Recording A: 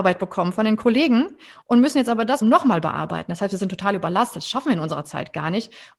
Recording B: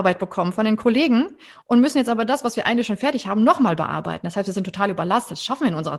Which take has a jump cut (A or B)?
A